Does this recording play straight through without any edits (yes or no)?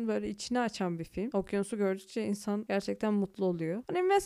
yes